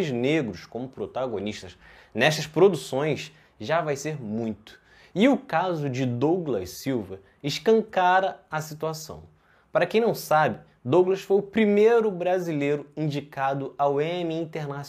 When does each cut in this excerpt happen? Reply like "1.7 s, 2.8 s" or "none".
none

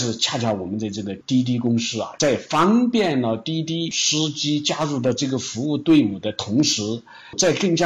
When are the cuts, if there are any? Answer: none

